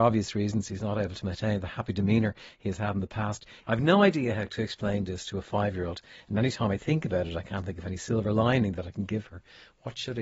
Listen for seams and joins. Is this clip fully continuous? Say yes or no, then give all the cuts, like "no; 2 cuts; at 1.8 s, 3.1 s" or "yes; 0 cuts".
no; 1 cut; at 3.6 s